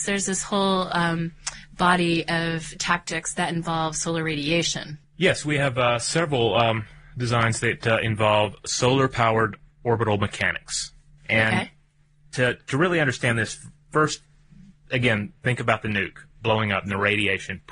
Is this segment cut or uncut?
uncut